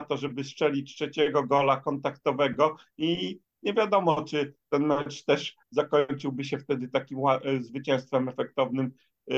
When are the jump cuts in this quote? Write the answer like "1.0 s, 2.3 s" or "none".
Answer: none